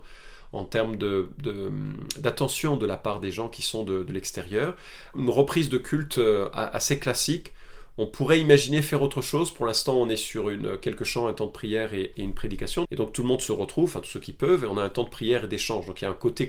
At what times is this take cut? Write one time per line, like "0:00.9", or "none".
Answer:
0:05.1
0:12.8